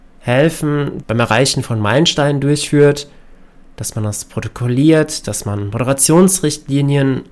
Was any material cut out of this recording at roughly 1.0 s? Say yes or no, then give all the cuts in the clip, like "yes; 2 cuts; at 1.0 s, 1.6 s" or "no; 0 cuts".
yes; 1 cut; at 1.0 s